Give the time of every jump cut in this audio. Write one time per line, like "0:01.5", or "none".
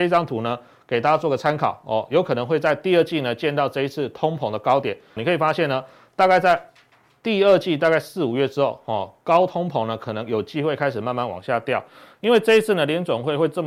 0:05.2